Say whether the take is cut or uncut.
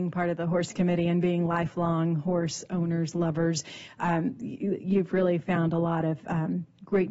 uncut